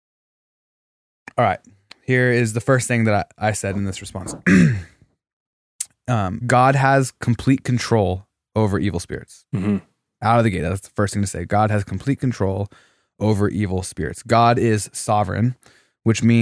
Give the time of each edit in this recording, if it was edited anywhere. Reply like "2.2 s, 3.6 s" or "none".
6.4 s